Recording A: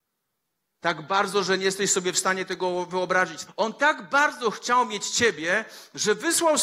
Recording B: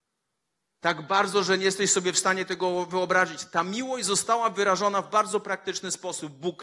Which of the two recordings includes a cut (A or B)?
A